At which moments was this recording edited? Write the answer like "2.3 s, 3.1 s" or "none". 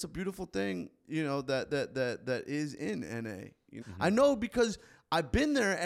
3.8 s